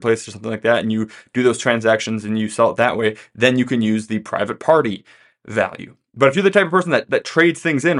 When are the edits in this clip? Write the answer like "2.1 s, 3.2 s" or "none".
none